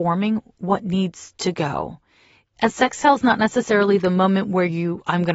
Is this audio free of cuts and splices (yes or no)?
yes